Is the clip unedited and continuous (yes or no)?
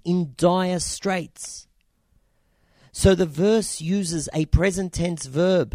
yes